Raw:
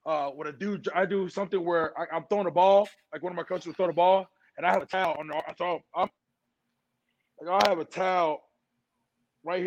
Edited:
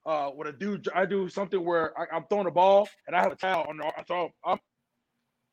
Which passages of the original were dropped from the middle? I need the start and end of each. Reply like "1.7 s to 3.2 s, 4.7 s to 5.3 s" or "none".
3.0 s to 4.5 s